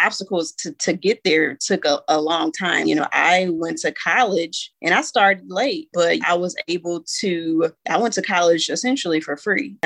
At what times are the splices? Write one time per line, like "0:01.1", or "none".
0:02.8
0:06.2